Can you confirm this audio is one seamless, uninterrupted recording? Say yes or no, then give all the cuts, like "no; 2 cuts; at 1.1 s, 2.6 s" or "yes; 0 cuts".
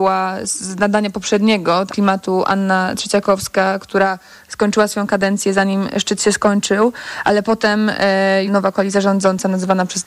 no; 2 cuts; at 1.9 s, 8.5 s